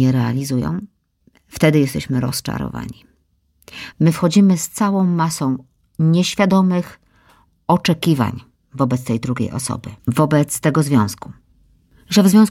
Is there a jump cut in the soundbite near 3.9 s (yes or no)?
yes